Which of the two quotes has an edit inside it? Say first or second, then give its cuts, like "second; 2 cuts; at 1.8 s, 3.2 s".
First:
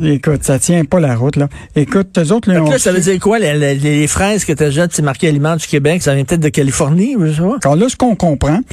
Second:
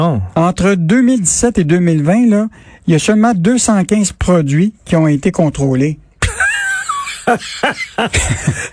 first; 3 cuts; at 2.1 s, 6.0 s, 7.6 s